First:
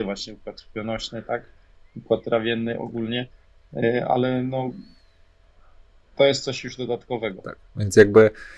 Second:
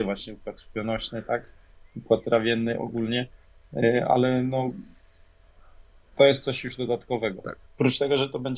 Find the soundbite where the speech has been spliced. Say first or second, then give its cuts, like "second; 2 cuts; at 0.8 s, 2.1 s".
second; 1 cut; at 7.7 s